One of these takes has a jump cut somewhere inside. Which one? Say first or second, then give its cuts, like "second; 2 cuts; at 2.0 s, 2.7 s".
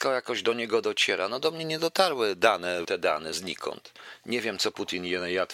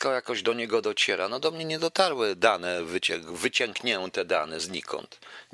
first; 1 cut; at 2.8 s